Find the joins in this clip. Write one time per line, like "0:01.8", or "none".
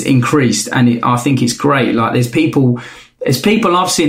none